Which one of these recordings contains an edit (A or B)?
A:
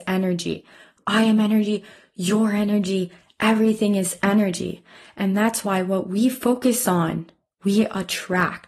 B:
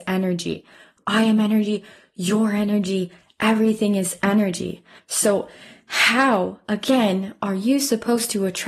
B